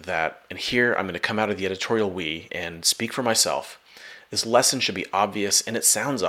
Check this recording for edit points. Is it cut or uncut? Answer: cut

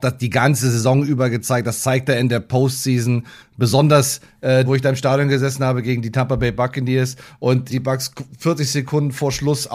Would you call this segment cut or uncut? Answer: cut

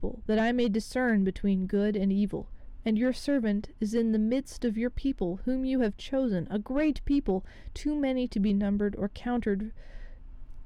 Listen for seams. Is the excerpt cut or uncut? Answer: cut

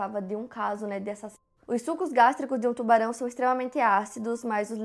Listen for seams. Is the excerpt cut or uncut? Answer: cut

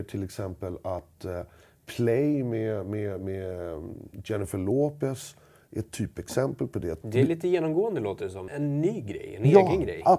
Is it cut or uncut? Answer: cut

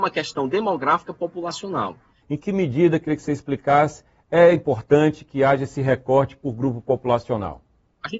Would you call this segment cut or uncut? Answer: cut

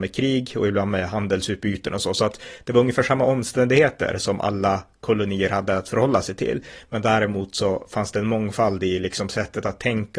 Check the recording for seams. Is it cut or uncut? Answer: uncut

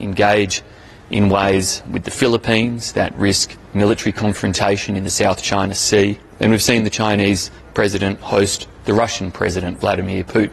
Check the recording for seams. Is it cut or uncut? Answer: cut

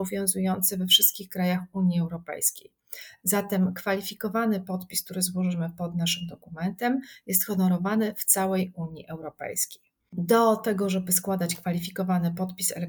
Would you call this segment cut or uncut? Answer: uncut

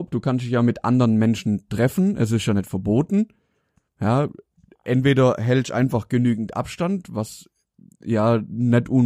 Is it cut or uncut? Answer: uncut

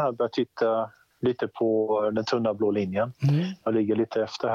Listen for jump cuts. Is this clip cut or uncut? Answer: uncut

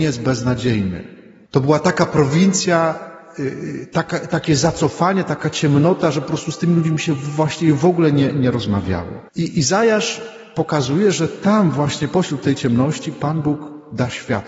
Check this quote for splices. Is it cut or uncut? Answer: cut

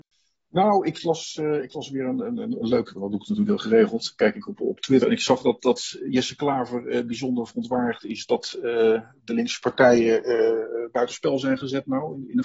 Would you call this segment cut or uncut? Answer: uncut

